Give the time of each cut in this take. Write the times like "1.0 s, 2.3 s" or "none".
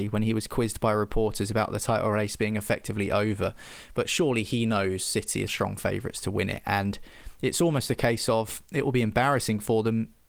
5.5 s